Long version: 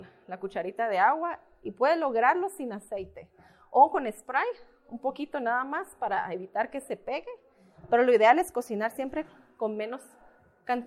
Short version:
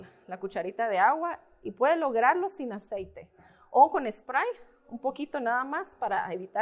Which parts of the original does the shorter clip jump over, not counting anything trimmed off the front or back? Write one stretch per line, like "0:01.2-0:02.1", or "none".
none